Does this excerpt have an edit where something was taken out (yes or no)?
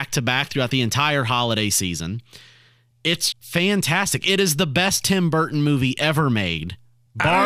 yes